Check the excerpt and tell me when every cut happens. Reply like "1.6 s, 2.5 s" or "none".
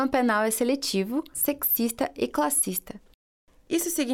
1.3 s